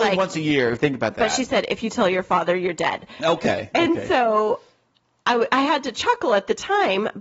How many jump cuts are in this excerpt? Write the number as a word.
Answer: zero